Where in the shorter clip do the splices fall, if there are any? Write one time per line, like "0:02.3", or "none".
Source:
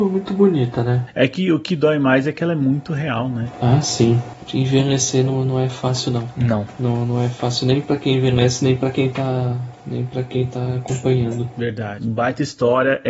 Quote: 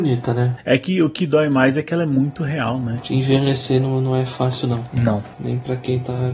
0:03.0
0:05.3